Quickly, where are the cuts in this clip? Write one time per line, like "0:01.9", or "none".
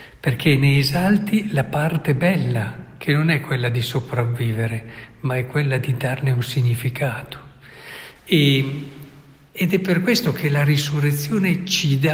0:08.2